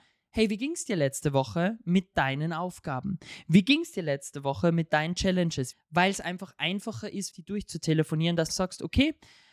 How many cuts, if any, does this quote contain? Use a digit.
3